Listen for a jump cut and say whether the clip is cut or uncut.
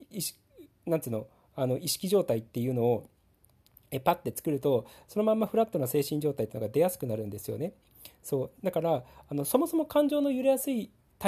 cut